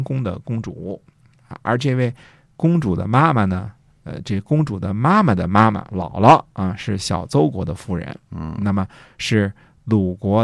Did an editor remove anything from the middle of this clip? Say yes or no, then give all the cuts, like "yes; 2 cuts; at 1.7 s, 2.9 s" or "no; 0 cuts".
no; 0 cuts